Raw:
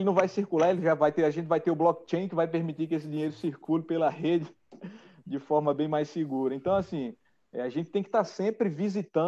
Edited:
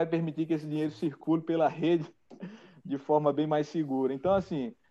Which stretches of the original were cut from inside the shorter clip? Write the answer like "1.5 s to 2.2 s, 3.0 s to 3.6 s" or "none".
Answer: none